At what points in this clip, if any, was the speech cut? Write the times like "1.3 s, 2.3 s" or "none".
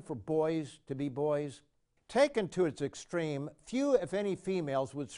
2.0 s